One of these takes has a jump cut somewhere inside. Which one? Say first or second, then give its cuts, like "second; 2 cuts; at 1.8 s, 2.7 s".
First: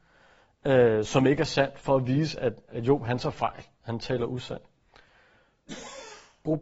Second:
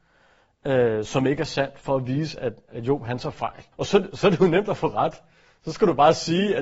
second; 1 cut; at 3.7 s